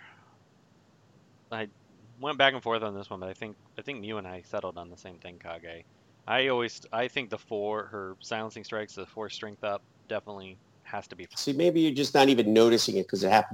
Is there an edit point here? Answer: yes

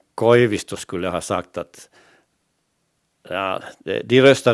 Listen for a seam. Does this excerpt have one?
no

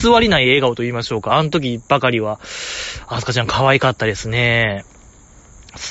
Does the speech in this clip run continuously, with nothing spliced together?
yes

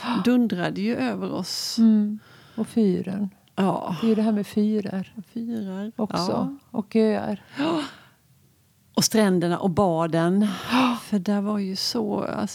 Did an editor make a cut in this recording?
no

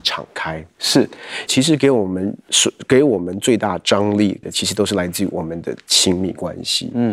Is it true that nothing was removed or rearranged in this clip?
no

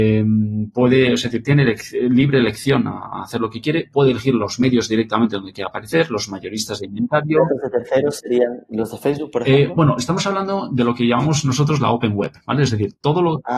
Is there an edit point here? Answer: no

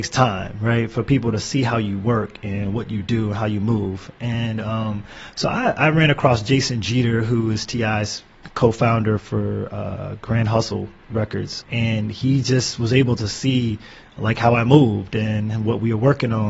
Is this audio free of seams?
no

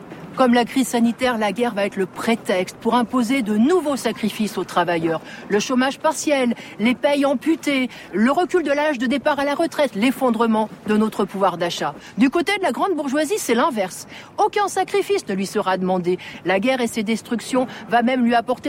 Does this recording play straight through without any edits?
yes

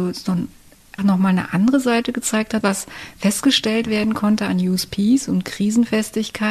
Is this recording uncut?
no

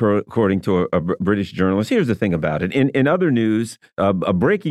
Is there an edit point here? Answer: yes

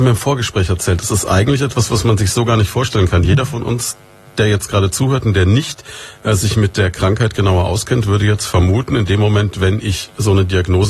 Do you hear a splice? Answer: no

